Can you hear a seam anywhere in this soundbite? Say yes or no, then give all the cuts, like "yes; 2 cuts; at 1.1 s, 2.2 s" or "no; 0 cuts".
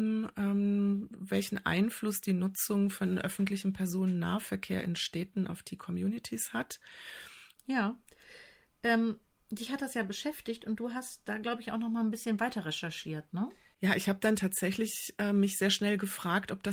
yes; 1 cut; at 7.6 s